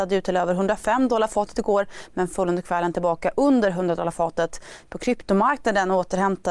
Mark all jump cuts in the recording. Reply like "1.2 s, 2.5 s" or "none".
4.8 s

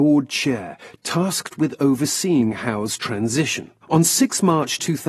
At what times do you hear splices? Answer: 3.8 s

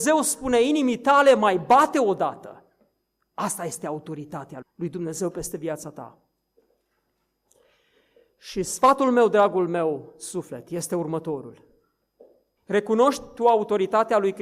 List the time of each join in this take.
4.6 s, 12.6 s

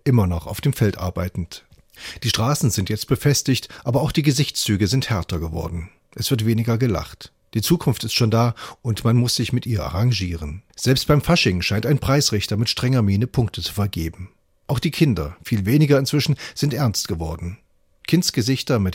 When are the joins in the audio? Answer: 10.7 s

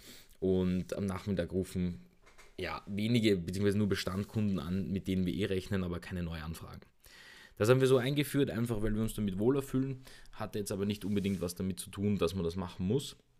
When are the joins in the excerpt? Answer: none

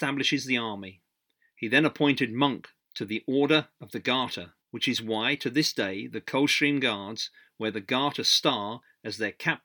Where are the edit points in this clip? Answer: 1.5 s, 4.6 s

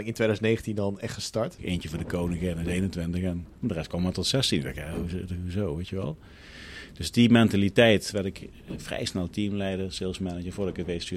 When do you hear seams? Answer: 1.6 s

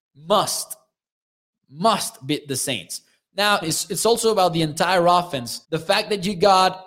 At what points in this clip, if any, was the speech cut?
3.6 s, 5.6 s

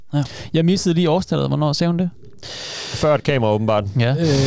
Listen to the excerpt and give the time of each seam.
none

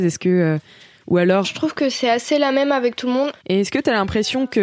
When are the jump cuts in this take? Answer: 1.4 s, 3.4 s

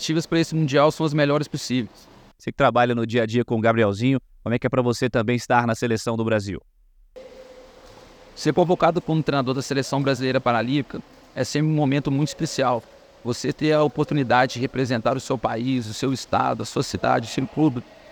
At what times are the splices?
2.3 s

